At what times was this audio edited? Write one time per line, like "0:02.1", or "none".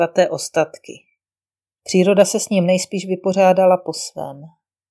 0:01.8